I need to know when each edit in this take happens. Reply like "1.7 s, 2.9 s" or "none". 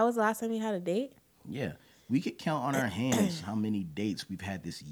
none